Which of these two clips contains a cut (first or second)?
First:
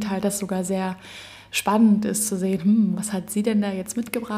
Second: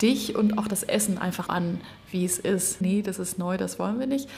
second